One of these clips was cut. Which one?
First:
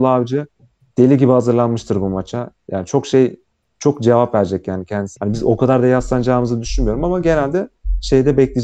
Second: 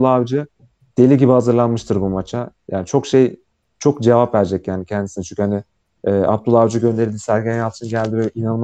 first; 1 cut; at 5.2 s

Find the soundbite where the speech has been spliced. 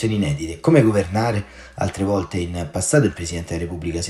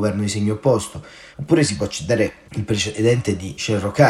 second; 1 cut; at 1.3 s

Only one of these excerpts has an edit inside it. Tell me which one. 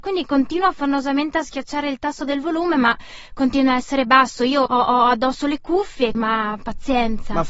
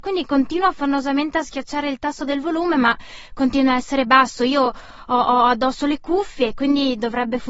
first; 2 cuts; at 4.7 s, 6.1 s

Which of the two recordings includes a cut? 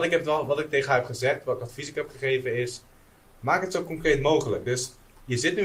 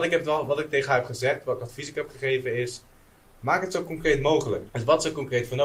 second; 1 cut; at 4.7 s

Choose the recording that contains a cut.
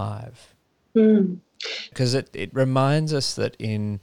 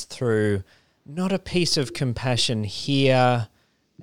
first; 1 cut; at 1.9 s

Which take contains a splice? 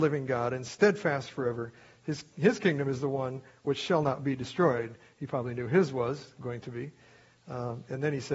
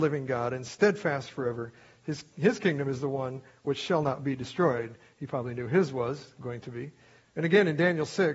second; 1 cut; at 7.2 s

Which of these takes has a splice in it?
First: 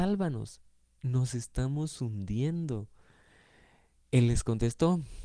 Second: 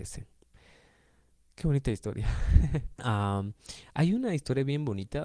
second; 1 cut; at 3.0 s

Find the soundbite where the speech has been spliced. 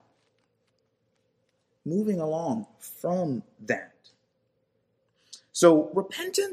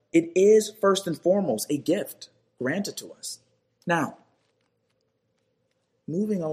second; 1 cut; at 3.8 s

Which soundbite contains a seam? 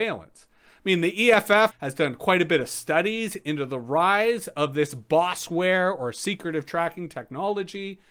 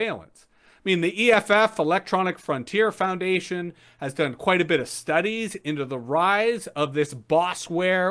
first; 1 cut; at 1.7 s

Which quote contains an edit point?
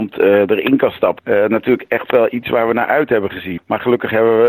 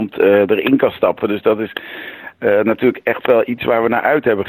first; 2 cuts; at 1.2 s, 3.6 s

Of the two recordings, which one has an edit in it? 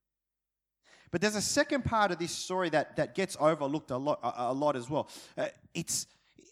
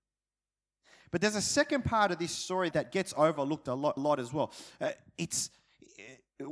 second; 2 cuts; at 2.7 s, 4.0 s

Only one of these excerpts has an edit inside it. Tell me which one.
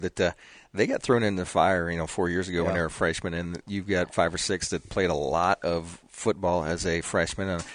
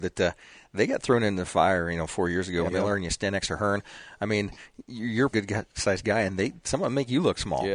second; 2 cuts; at 2.7 s, 5.3 s

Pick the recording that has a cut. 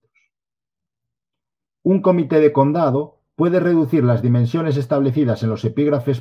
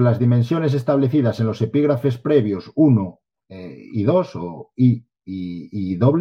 first; 1 cut; at 1.7 s

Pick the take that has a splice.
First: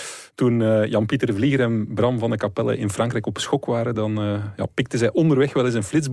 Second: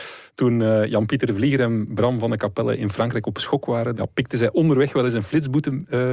second; 1 cut; at 3.9 s

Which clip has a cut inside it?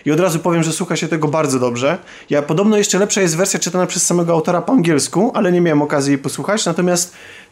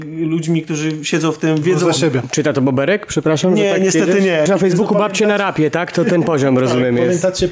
second; 1 cut; at 4.5 s

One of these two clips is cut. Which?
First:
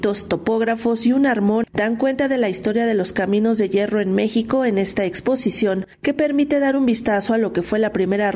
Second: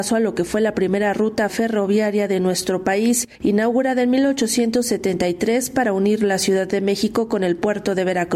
first; 1 cut; at 1.7 s

